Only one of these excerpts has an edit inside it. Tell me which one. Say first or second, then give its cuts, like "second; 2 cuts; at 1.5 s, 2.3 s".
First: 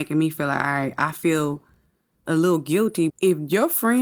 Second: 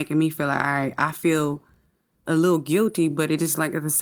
first; 1 cut; at 3.1 s